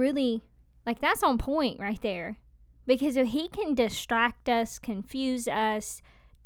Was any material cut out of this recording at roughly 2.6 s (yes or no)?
no